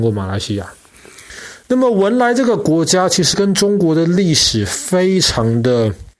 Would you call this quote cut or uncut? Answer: uncut